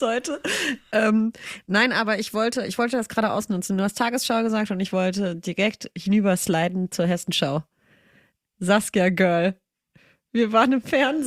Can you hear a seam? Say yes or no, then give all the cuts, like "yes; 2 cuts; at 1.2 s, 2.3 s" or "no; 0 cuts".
no; 0 cuts